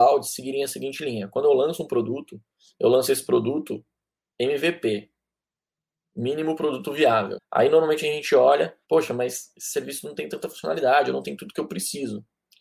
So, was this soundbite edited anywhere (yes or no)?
yes